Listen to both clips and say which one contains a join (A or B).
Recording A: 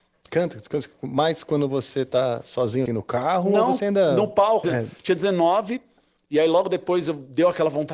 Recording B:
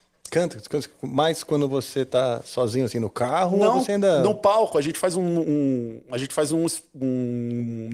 A